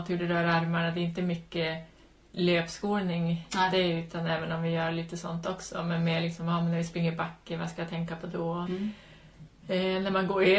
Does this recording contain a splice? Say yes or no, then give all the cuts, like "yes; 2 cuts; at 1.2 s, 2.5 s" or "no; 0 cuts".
yes; 2 cuts; at 3.5 s, 8.7 s